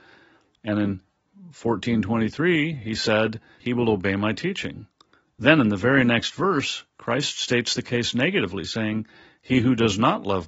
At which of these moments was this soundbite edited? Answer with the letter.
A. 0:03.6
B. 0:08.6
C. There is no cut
A